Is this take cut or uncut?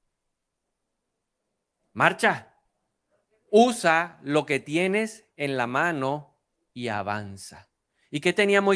uncut